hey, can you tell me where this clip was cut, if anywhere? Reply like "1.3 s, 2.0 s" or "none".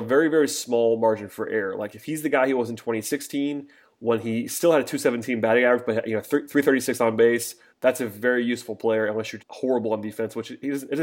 7.7 s, 9.4 s

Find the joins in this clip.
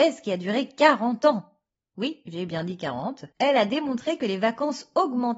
3.3 s

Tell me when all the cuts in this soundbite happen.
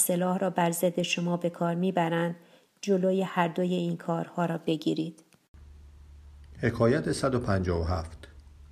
none

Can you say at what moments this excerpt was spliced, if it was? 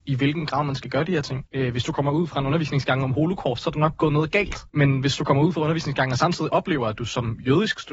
1.5 s, 3.6 s, 4.7 s

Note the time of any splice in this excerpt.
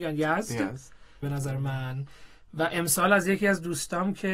1.2 s

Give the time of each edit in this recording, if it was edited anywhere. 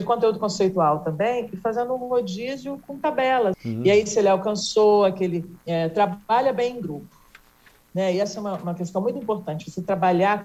3.5 s, 5.6 s

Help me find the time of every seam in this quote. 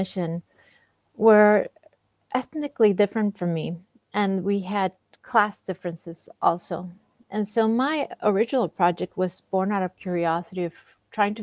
none

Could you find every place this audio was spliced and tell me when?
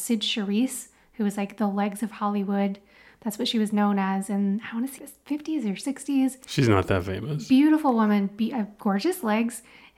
5.0 s

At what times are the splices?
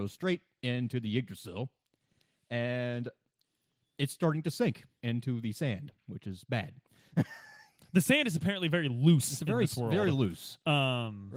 none

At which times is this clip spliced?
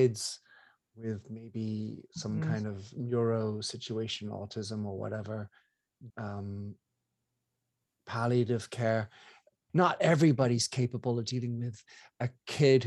6.1 s, 9.7 s

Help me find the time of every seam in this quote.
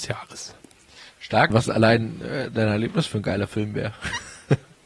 1.5 s

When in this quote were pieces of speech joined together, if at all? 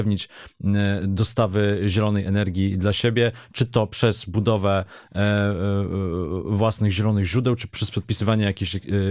none

